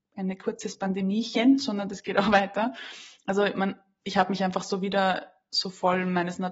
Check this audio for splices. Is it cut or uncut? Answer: uncut